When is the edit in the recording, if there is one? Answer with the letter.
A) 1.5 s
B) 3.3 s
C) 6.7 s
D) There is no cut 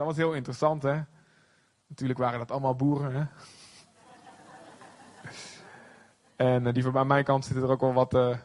D